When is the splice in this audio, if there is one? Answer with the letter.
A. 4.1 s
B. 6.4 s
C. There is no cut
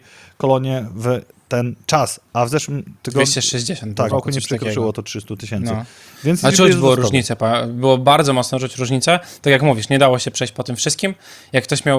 A